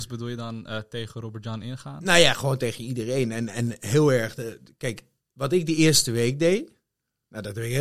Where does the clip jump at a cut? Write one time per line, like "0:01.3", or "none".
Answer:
none